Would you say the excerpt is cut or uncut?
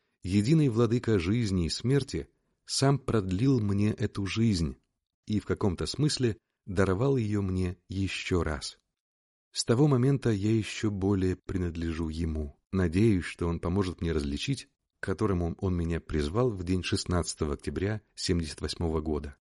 cut